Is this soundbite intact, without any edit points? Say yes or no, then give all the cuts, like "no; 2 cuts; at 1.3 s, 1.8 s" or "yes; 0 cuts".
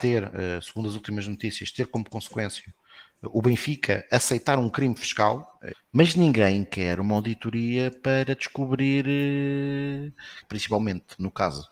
no; 2 cuts; at 5.7 s, 10.4 s